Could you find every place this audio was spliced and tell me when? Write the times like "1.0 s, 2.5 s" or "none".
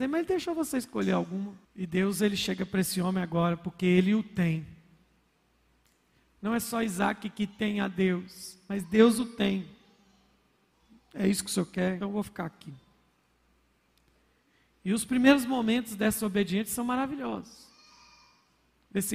1.6 s, 12.0 s